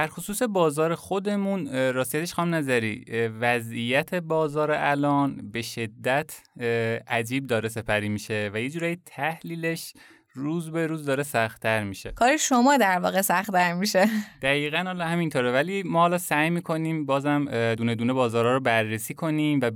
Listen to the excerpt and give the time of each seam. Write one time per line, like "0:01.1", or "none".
none